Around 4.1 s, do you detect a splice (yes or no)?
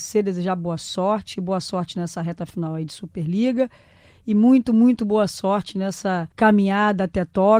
no